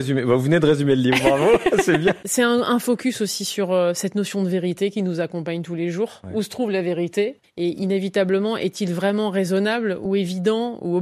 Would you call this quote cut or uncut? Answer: uncut